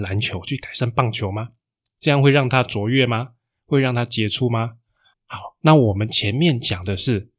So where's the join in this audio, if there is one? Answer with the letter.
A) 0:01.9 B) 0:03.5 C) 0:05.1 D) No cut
C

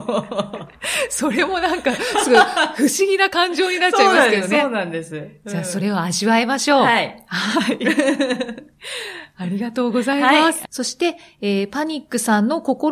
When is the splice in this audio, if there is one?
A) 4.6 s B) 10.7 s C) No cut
B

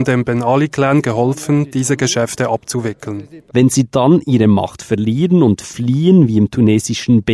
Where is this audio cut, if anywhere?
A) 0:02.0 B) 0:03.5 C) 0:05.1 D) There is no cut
B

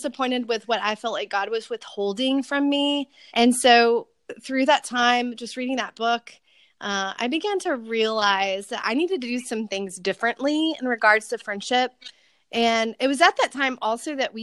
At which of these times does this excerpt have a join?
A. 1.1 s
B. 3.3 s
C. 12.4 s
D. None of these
B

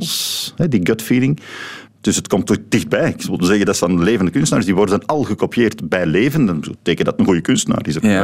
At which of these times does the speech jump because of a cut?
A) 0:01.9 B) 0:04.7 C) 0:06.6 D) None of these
A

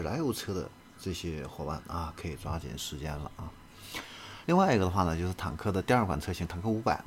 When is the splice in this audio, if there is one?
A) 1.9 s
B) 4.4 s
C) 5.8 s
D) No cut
B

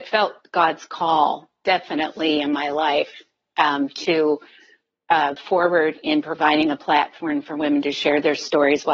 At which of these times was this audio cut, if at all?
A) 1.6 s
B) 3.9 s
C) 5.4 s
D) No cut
C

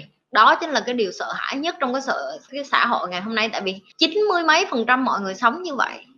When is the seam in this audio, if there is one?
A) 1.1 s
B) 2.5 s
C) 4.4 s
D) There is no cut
B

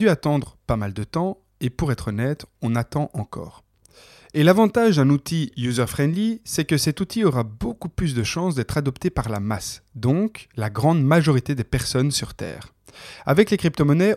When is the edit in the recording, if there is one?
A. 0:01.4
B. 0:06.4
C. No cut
C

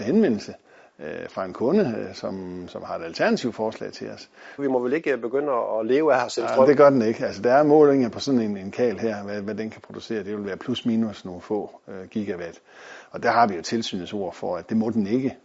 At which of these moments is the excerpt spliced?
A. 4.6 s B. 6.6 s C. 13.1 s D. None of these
A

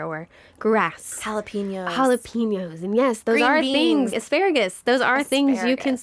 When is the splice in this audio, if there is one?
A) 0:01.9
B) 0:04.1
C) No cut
B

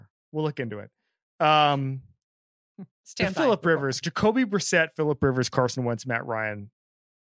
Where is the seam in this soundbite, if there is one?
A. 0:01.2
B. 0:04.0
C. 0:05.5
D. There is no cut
B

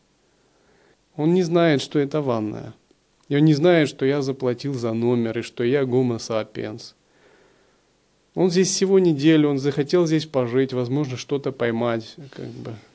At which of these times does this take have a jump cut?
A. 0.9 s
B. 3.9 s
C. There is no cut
A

